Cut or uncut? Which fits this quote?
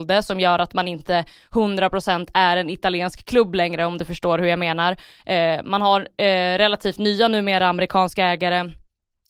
uncut